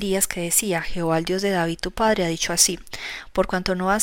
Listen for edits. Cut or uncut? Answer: uncut